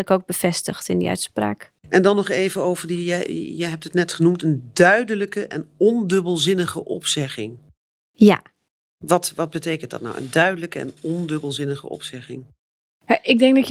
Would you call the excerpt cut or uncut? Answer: cut